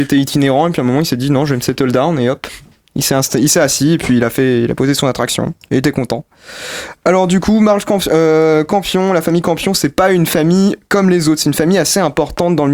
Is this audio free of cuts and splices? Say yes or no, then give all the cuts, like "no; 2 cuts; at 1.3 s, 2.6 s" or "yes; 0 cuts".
yes; 0 cuts